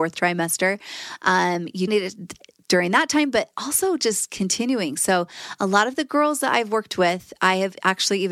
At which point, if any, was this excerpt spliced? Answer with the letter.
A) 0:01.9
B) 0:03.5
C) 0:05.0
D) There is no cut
A